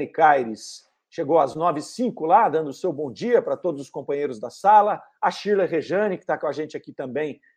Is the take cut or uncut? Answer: uncut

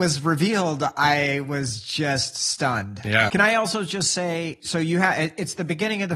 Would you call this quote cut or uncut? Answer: cut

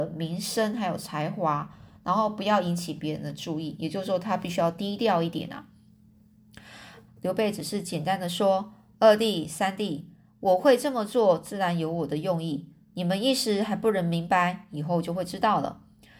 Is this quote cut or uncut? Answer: cut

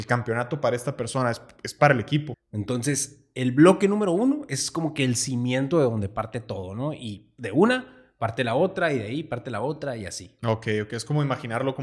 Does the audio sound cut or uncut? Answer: cut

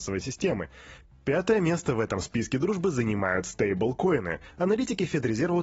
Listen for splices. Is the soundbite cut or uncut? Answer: uncut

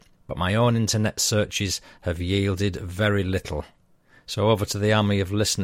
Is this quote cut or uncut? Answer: uncut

